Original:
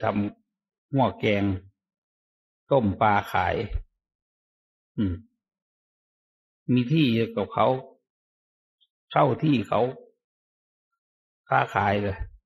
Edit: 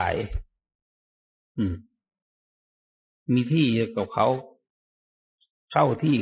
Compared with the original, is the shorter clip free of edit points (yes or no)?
yes